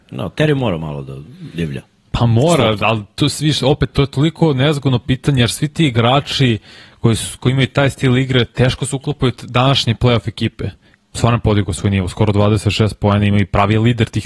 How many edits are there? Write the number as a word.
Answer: one